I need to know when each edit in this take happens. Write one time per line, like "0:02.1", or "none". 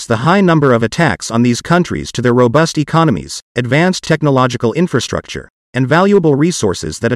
none